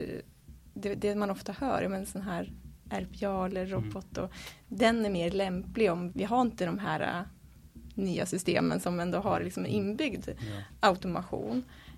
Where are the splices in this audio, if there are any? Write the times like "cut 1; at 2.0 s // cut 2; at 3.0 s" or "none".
cut 1; at 6.1 s